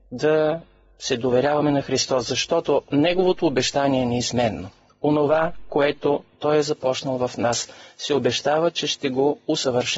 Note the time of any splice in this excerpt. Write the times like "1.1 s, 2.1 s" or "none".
none